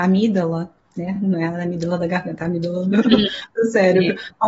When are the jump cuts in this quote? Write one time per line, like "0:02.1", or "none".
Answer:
none